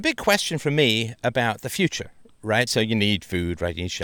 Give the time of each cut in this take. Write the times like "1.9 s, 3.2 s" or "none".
2.7 s